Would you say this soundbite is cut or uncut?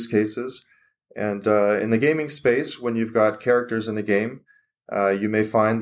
uncut